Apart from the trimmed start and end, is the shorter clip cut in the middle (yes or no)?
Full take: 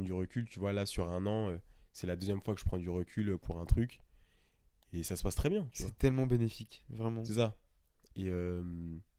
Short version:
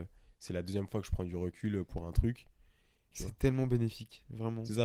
yes